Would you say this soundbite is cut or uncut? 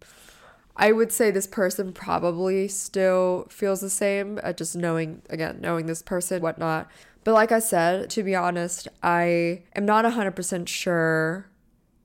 cut